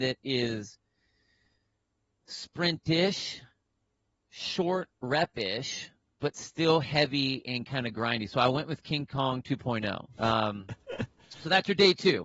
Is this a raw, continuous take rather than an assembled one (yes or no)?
no